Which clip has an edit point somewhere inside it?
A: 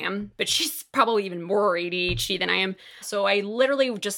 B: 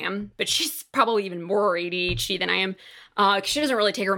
A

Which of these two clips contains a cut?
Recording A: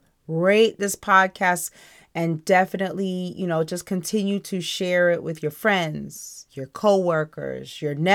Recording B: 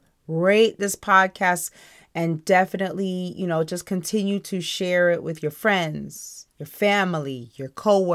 A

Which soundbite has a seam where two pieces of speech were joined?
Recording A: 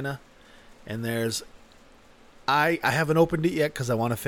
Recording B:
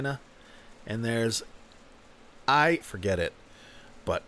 B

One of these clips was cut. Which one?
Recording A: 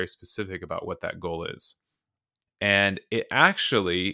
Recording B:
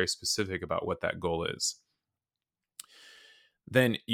A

